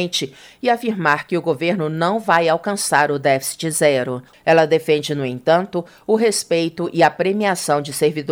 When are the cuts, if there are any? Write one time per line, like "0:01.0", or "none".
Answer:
0:04.3